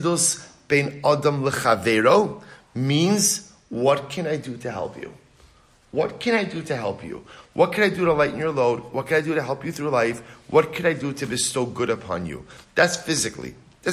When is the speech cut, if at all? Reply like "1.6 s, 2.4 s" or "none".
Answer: none